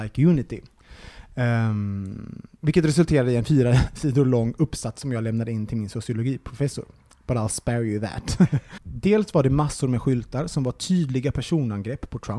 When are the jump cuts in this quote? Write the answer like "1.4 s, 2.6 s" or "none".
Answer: 8.8 s